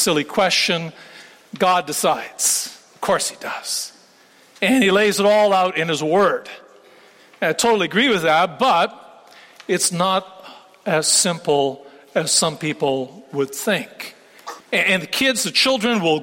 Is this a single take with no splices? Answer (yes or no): no